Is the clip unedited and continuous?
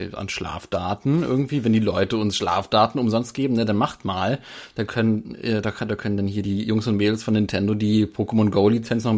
yes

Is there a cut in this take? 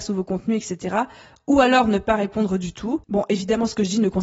yes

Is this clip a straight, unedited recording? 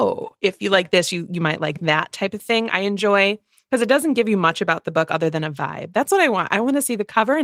yes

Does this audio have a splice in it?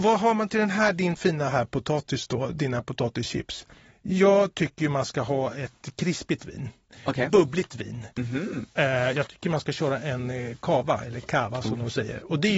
no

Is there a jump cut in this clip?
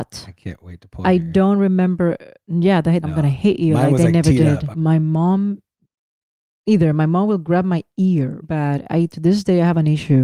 yes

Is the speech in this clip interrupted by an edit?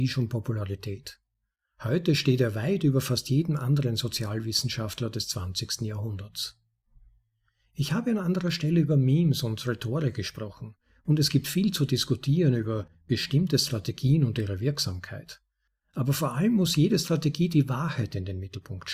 no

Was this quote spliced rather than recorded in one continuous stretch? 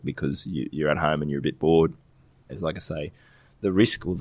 yes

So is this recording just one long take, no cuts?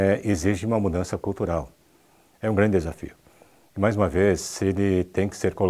no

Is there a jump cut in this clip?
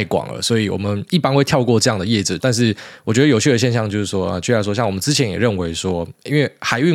yes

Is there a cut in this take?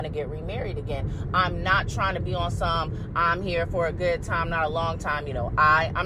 no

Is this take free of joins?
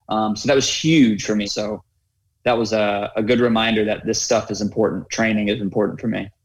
no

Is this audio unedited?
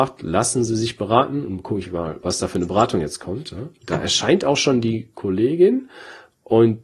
no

